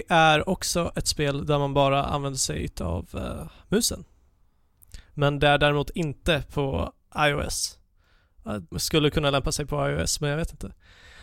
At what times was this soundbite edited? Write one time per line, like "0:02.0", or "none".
0:08.7